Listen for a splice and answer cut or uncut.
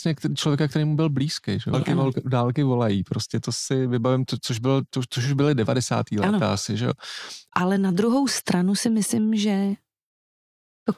cut